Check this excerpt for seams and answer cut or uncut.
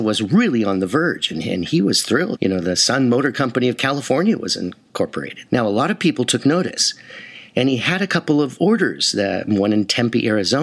cut